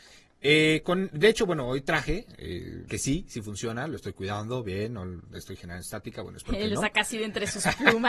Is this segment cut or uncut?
cut